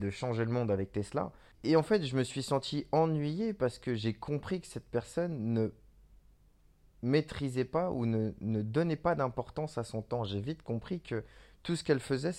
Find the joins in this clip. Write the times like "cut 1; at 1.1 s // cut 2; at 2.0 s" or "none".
cut 1; at 1.5 s